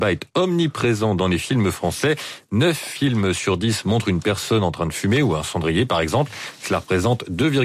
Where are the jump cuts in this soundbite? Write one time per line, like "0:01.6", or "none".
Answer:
none